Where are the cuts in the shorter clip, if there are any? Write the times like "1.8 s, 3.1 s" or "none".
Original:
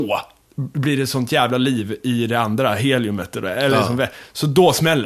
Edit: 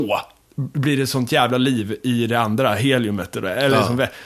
none